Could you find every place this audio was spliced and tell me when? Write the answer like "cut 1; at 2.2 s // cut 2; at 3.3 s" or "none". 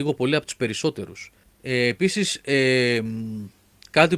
cut 1; at 1.4 s